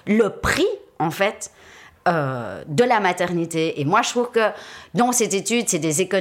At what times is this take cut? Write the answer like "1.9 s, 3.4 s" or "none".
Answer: none